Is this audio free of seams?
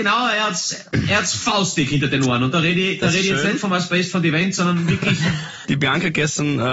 no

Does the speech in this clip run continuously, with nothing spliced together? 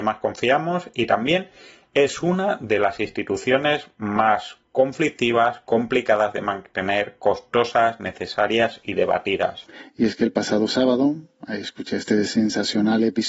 yes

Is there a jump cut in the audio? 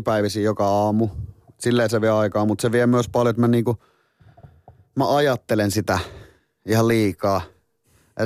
no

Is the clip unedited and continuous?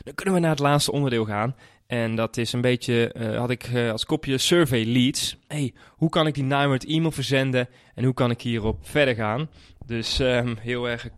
no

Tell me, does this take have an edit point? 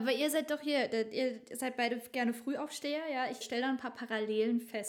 yes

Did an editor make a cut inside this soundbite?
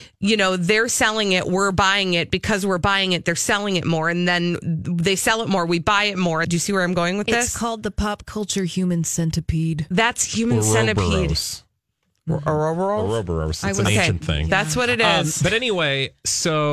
yes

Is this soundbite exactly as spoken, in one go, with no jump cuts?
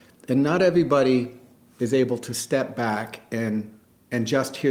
yes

